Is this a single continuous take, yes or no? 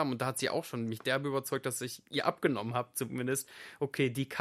yes